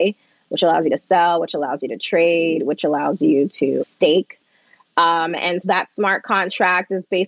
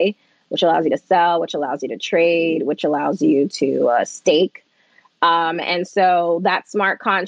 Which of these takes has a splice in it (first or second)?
first